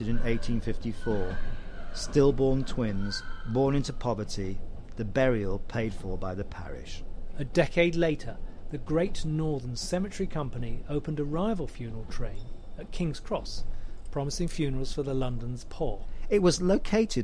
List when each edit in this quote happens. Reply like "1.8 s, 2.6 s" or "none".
none